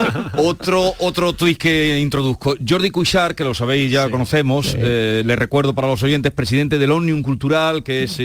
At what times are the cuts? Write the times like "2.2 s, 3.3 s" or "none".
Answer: none